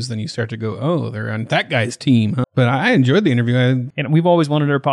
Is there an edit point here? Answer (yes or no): yes